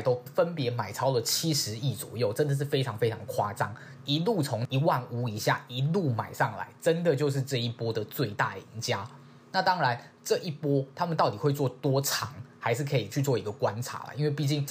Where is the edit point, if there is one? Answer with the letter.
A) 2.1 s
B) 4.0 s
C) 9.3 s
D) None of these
B